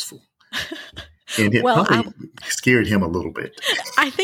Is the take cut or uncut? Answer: uncut